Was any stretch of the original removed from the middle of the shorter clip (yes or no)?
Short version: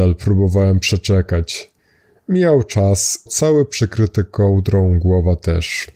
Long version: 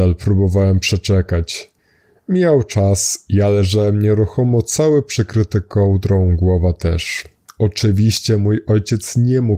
yes